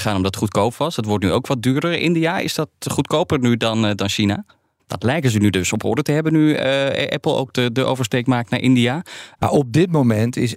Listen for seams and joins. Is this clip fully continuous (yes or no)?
no